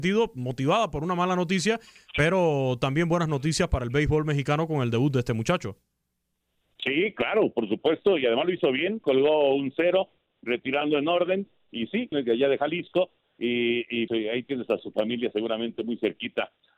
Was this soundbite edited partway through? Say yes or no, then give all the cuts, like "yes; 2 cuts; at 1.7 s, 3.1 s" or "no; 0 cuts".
yes; 2 cuts; at 12.1 s, 14.1 s